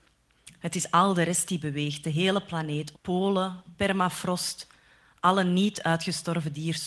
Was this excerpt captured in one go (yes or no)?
no